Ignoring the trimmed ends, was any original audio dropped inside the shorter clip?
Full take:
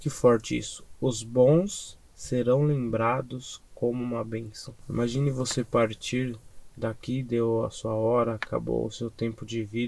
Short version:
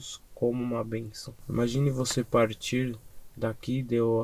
no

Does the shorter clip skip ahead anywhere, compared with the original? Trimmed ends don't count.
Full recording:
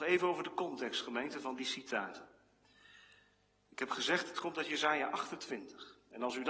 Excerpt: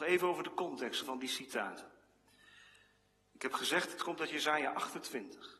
yes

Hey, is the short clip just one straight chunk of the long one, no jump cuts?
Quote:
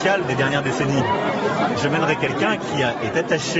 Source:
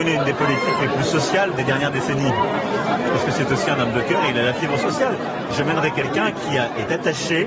no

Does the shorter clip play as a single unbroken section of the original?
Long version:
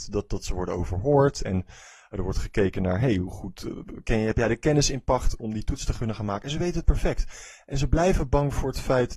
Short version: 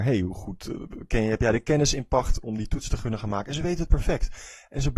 yes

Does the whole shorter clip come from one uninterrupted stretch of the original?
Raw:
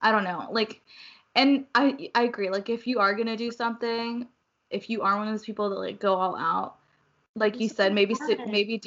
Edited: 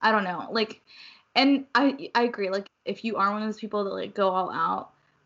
no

